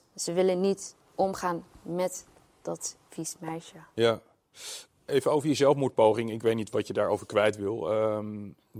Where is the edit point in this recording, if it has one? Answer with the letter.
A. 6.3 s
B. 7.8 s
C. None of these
C